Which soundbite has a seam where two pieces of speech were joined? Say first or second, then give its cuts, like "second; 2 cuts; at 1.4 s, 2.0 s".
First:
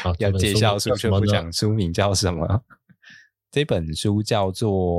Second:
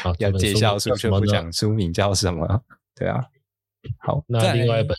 second; 1 cut; at 2.8 s